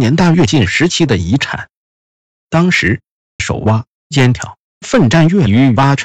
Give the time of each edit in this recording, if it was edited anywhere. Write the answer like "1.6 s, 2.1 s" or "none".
3.4 s, 4.7 s